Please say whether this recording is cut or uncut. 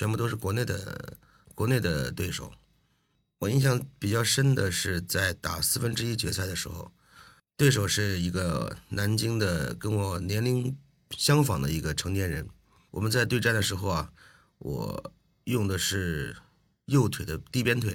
cut